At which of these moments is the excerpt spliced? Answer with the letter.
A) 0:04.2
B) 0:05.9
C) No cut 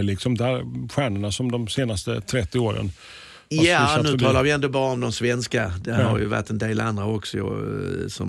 C